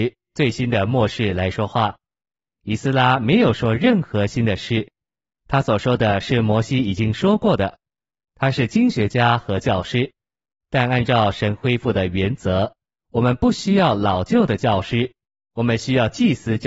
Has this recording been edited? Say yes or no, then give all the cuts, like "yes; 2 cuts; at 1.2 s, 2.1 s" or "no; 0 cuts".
no; 0 cuts